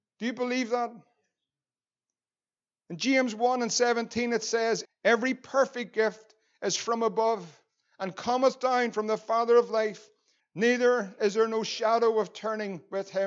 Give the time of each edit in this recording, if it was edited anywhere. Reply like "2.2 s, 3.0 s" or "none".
4.8 s, 10.4 s